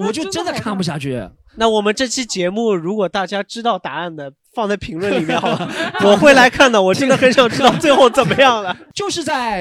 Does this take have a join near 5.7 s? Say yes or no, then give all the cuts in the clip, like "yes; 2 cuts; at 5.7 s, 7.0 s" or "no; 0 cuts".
no; 0 cuts